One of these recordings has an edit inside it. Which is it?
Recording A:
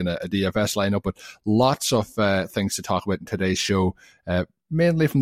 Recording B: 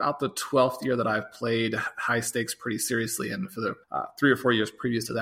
B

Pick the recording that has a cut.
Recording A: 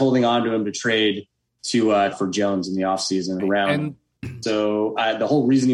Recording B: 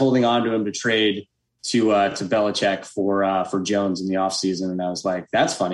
A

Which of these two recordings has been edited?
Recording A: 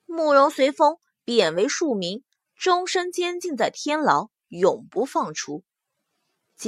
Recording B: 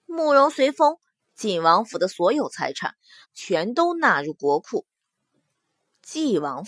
B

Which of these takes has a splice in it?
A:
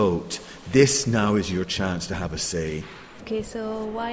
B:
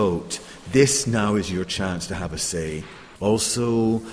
B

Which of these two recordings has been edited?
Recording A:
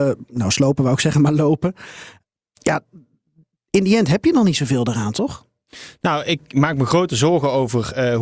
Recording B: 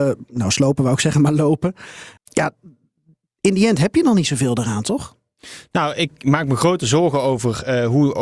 B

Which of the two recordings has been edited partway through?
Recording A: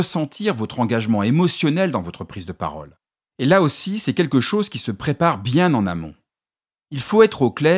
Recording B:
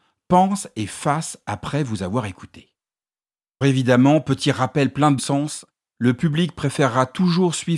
B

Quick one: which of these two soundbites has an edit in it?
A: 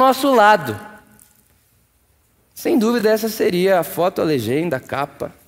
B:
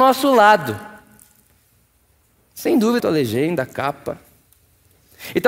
B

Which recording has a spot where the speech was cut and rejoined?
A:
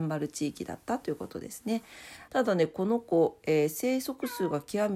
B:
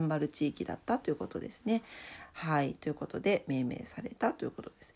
A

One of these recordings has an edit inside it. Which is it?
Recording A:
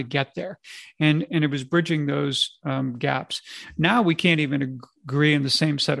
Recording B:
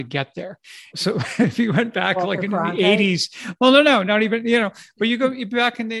B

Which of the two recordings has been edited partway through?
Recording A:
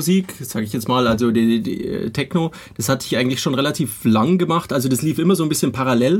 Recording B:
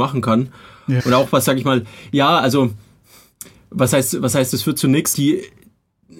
B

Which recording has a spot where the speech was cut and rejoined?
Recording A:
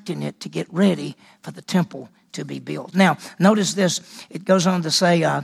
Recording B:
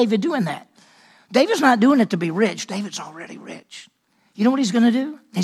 A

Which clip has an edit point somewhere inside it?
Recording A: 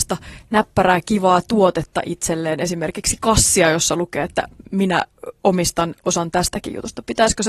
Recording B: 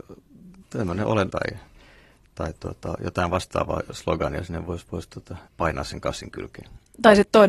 B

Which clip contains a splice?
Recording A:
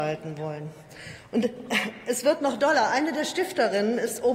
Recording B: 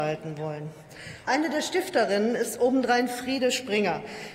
B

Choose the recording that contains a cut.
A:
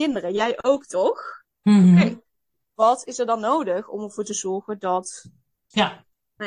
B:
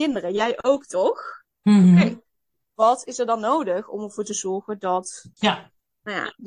B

